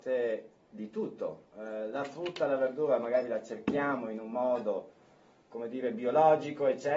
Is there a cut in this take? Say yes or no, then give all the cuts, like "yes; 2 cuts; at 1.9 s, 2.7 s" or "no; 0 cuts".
no; 0 cuts